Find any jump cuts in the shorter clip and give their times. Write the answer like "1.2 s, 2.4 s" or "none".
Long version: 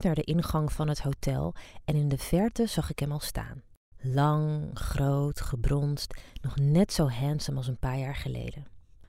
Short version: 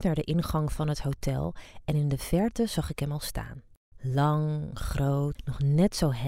5.3 s